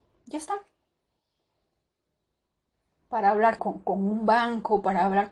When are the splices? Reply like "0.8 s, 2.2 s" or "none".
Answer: 3.6 s